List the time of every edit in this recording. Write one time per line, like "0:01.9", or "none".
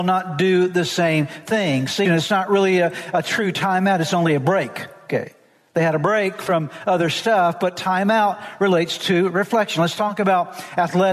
0:02.1